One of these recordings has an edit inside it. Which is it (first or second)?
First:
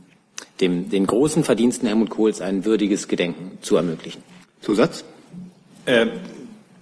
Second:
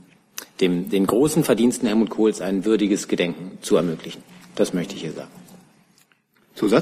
first